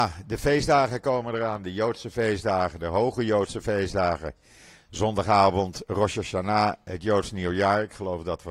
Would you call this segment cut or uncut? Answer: uncut